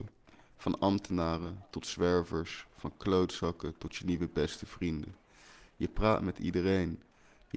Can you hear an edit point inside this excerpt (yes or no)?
no